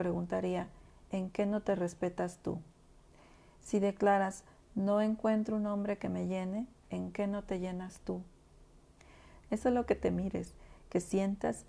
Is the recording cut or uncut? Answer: cut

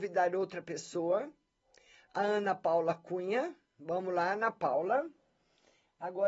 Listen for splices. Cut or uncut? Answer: uncut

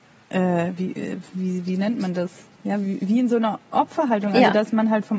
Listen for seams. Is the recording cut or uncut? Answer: uncut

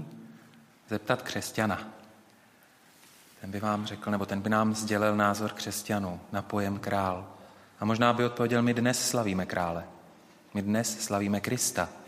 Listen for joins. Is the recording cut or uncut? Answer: uncut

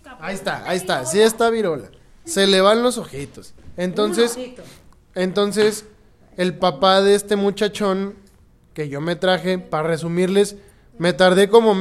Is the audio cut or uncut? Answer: cut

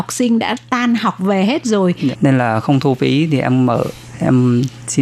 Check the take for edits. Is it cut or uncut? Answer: cut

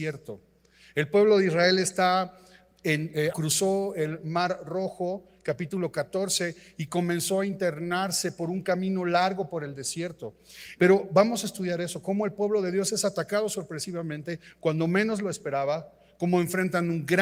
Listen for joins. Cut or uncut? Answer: cut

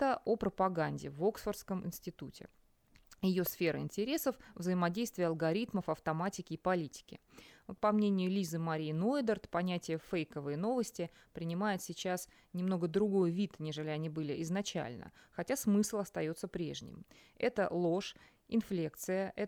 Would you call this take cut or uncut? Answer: uncut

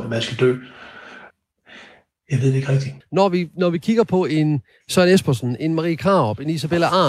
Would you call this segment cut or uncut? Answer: cut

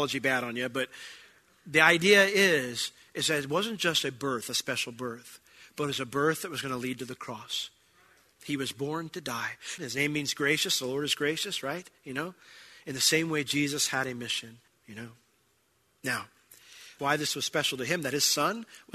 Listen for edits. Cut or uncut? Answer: cut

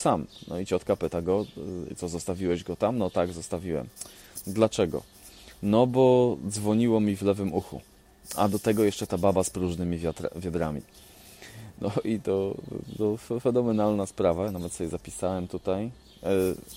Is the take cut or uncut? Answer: cut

